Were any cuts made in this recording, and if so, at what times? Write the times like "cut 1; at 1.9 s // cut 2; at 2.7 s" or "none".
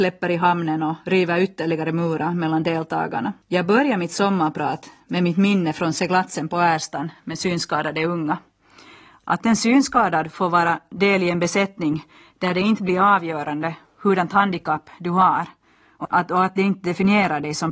cut 1; at 3.4 s // cut 2; at 16.0 s